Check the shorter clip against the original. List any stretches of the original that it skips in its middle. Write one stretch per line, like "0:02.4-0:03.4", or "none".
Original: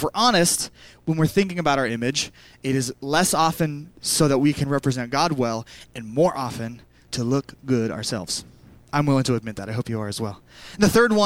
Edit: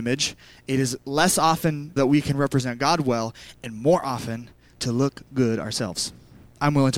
0:03.9-0:04.3